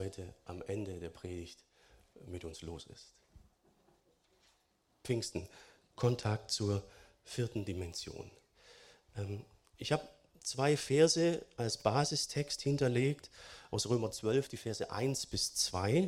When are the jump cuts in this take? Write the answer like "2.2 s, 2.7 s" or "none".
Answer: none